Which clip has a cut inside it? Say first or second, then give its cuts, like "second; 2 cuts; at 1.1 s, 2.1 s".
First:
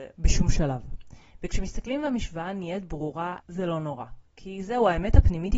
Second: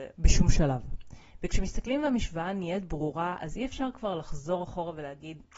first; 1 cut; at 3.4 s